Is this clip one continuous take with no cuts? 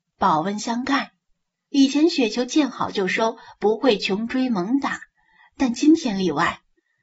no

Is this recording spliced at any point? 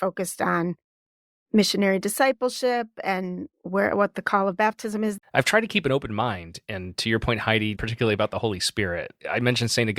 yes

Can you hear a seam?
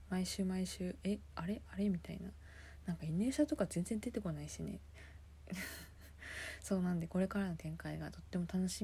no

